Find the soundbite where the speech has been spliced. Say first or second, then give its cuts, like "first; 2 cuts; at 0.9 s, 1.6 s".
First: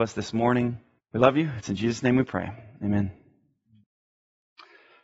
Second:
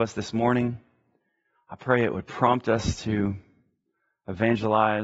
first; 1 cut; at 1.0 s